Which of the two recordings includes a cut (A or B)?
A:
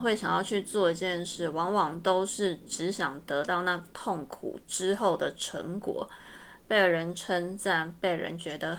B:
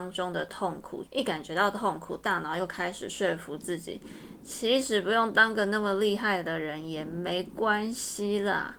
B